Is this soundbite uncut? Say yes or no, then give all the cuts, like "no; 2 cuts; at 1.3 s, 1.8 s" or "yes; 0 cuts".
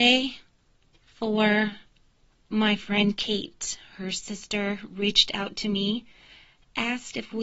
yes; 0 cuts